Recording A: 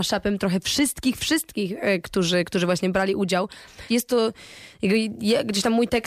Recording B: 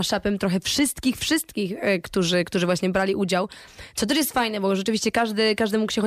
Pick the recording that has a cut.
A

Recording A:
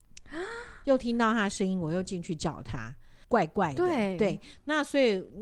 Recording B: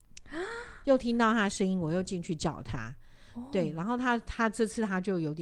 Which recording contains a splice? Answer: A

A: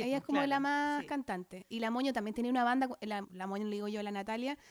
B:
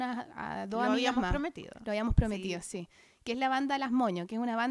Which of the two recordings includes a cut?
A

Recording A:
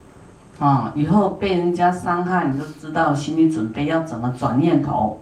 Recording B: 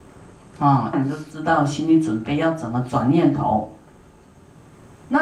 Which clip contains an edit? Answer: B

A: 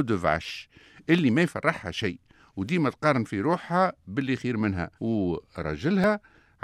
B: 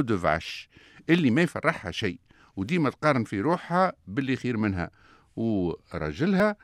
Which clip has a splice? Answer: A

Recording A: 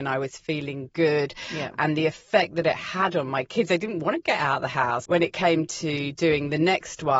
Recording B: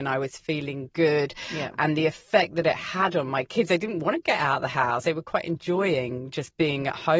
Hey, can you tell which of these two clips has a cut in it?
A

